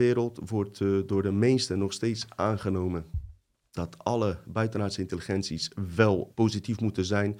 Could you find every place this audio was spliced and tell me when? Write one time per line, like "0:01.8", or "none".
0:03.8
0:06.3